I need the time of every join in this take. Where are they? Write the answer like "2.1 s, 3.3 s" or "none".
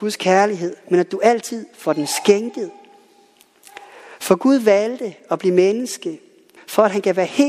6.6 s